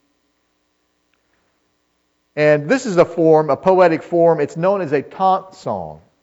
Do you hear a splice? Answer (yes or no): no